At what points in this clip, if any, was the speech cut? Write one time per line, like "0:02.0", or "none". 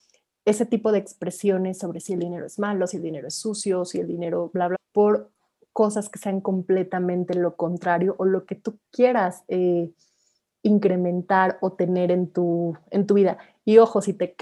0:04.7